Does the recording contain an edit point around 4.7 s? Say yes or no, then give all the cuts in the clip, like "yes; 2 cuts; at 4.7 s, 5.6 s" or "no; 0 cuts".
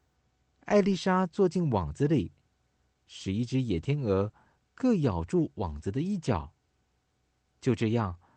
no; 0 cuts